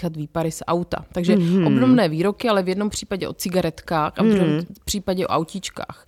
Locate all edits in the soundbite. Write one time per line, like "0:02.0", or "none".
none